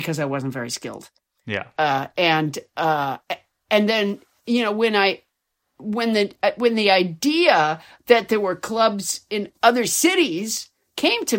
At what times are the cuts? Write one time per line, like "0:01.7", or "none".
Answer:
none